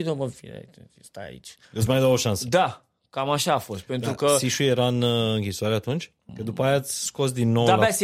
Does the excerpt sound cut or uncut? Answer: cut